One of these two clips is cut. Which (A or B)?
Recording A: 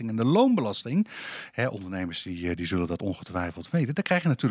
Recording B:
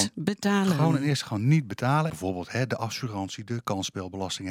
B